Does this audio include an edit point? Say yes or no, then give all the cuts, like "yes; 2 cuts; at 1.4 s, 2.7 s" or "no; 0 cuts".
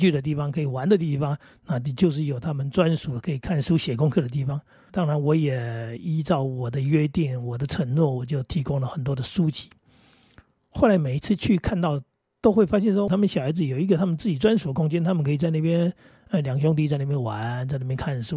yes; 2 cuts; at 4.9 s, 13.1 s